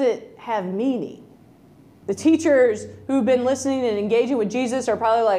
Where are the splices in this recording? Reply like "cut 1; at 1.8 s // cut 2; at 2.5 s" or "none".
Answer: cut 1; at 2.0 s